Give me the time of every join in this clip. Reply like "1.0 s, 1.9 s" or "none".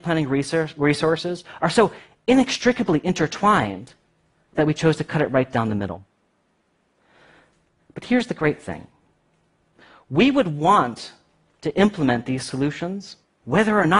7.8 s